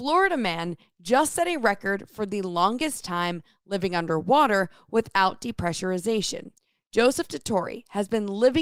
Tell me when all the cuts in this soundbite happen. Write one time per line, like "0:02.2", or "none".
none